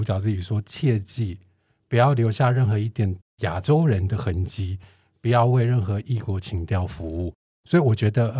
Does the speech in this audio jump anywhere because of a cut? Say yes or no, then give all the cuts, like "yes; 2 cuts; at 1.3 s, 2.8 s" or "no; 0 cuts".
no; 0 cuts